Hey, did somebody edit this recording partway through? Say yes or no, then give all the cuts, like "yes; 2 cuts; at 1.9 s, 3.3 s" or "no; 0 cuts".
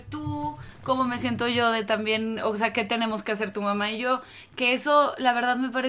no; 0 cuts